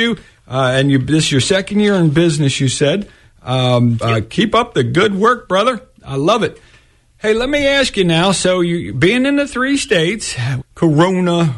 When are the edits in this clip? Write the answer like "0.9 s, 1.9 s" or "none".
4.0 s, 10.6 s